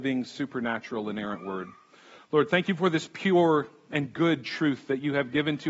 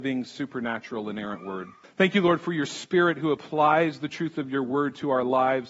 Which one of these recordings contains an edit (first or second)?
second